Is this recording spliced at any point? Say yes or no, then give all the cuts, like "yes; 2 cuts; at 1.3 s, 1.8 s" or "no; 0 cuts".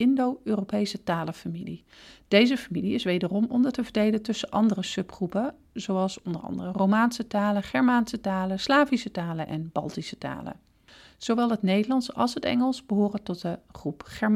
no; 0 cuts